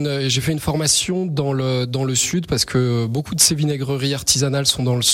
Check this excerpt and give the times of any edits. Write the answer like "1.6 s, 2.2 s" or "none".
none